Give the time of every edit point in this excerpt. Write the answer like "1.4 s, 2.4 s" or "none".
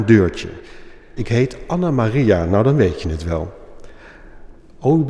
1.2 s